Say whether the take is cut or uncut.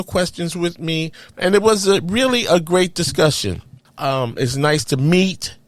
cut